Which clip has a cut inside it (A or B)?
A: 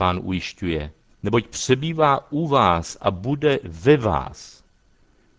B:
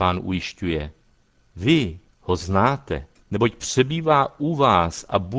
A